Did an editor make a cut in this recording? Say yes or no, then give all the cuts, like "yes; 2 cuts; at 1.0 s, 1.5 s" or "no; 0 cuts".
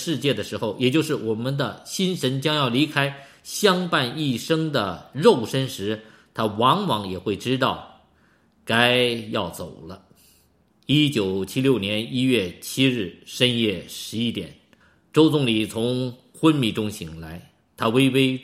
no; 0 cuts